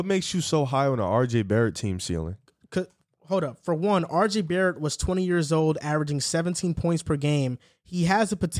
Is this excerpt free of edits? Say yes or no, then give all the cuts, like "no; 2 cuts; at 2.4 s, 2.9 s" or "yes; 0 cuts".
yes; 0 cuts